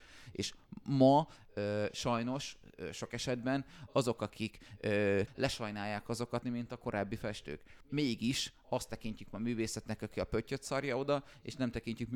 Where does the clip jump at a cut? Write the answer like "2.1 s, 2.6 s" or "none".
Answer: 5.3 s, 6.4 s, 7.8 s